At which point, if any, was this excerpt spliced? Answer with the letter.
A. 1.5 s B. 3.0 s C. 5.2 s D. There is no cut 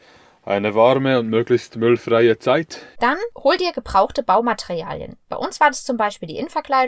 B